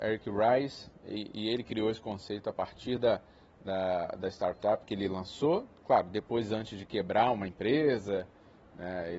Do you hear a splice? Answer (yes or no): no